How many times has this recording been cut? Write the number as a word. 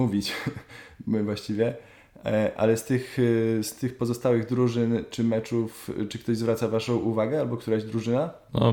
zero